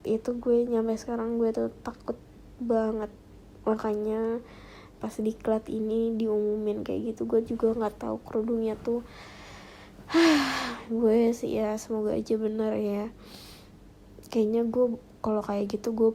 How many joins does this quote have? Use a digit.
1